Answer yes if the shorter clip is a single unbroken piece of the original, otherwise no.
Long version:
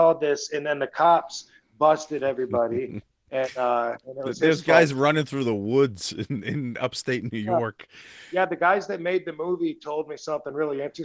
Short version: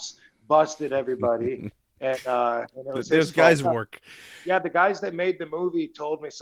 no